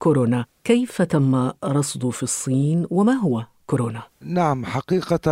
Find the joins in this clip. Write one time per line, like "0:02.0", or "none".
0:04.1